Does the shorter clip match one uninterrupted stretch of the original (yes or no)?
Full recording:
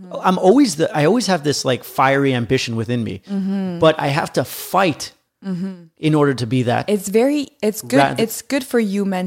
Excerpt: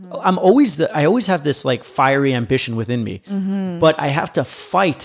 yes